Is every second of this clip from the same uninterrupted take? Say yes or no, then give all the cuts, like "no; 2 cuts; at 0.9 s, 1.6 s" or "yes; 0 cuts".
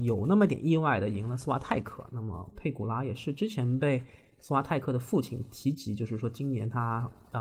yes; 0 cuts